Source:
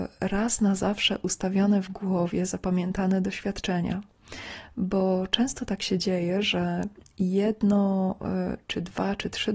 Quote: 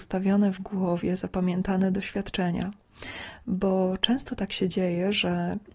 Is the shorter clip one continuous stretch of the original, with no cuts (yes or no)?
yes